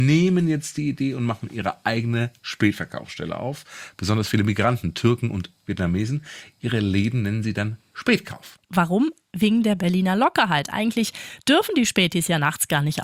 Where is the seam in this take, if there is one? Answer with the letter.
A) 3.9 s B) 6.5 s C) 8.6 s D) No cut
C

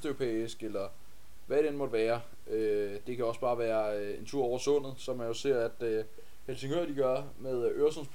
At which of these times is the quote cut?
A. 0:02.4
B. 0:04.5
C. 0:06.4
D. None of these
D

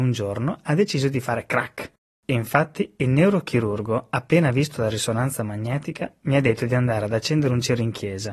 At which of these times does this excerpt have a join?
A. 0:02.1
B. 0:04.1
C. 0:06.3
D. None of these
A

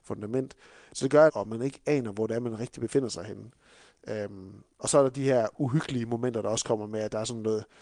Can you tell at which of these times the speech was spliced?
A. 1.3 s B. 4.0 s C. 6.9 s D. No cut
A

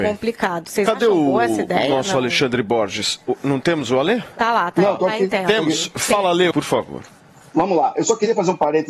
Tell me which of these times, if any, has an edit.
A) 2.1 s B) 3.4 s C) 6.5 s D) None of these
C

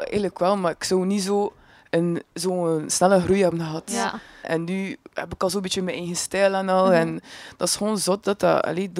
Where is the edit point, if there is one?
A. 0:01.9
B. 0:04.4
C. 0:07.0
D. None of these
B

